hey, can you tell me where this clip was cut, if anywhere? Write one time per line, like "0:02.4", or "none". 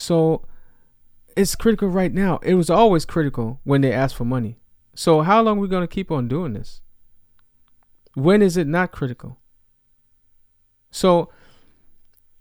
none